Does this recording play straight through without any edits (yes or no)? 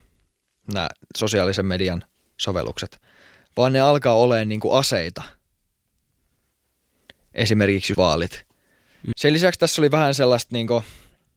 no